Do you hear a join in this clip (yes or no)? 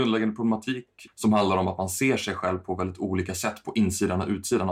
yes